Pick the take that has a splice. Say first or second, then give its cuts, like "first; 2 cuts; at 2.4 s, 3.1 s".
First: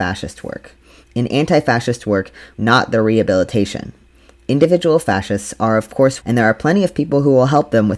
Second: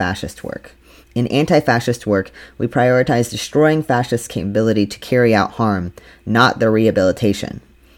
first; 2 cuts; at 2.5 s, 6.2 s